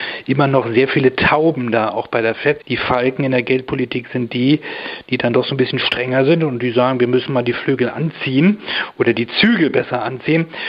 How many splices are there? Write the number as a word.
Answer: one